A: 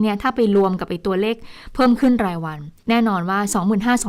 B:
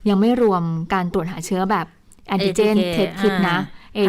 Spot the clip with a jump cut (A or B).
A